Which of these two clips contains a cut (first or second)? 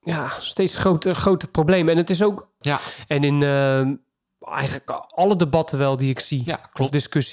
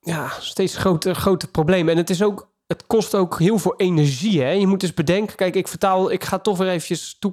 first